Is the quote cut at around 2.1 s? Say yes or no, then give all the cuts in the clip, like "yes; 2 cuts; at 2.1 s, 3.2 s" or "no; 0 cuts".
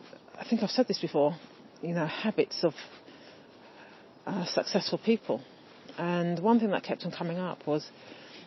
no; 0 cuts